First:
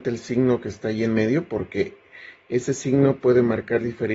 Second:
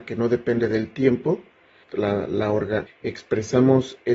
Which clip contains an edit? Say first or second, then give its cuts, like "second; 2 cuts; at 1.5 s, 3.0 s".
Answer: second; 2 cuts; at 1.8 s, 2.9 s